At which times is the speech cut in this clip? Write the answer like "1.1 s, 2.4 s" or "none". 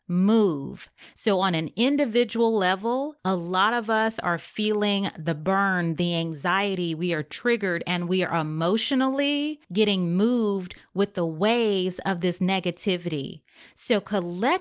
none